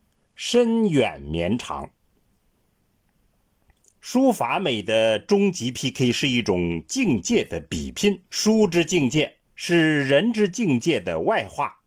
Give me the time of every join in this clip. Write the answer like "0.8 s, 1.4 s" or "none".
4.0 s, 8.3 s, 9.4 s